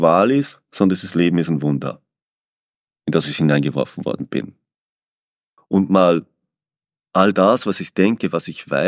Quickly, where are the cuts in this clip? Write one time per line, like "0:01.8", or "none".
0:05.6